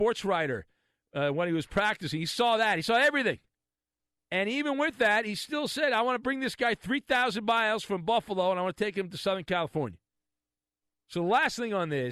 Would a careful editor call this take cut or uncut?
uncut